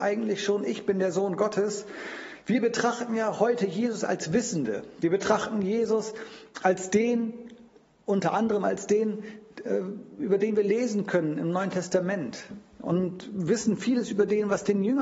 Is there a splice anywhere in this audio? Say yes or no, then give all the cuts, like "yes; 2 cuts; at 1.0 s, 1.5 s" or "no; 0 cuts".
no; 0 cuts